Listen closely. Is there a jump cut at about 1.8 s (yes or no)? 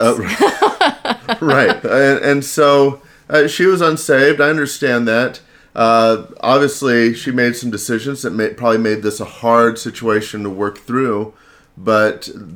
yes